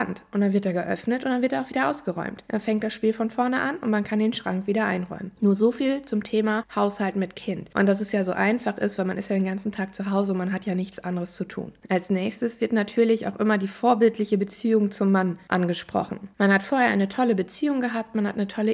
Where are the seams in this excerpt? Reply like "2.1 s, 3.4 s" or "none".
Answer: none

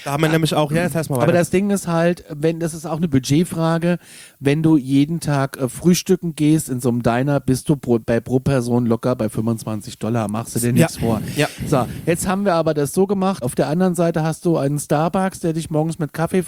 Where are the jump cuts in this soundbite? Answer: 13.4 s

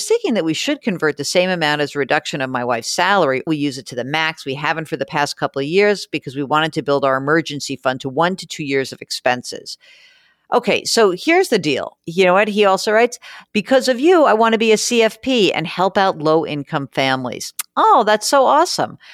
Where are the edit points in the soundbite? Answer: 3.5 s, 12.0 s

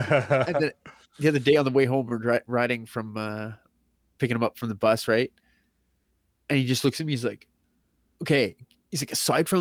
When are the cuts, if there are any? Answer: none

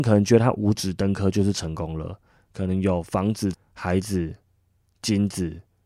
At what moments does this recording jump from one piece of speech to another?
3.5 s

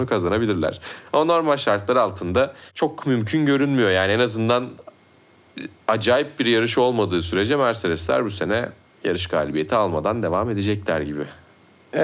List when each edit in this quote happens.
none

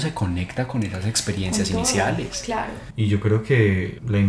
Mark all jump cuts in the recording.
2.9 s

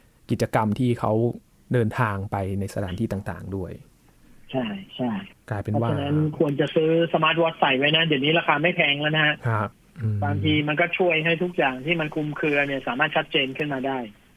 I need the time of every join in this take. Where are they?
none

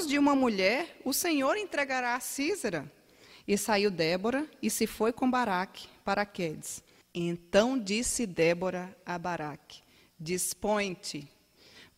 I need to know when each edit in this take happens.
7.0 s

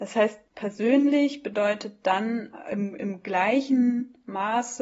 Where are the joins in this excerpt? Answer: none

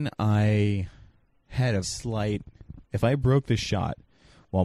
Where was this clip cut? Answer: 1.8 s

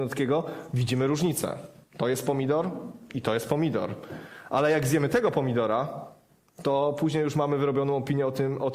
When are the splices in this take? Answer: none

